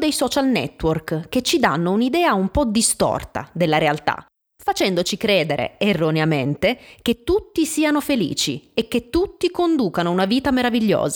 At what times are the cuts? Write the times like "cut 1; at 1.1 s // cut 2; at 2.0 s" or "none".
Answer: none